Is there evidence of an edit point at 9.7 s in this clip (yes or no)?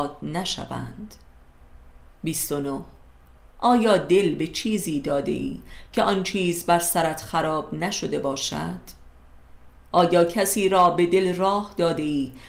yes